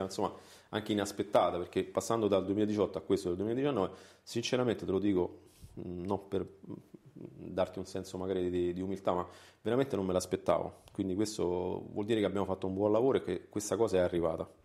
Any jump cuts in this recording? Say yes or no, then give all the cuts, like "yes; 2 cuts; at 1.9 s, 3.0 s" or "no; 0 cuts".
no; 0 cuts